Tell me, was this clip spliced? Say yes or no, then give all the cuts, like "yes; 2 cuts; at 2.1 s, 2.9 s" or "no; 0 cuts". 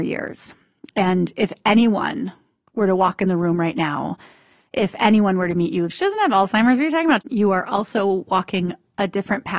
yes; 2 cuts; at 5.9 s, 7.2 s